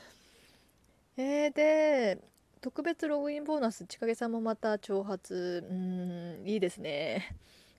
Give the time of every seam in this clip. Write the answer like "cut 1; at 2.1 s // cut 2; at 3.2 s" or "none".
cut 1; at 3.9 s